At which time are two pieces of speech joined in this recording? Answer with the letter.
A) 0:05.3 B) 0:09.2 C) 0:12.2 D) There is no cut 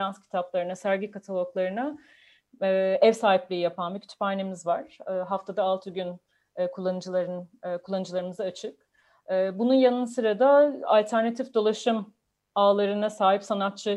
D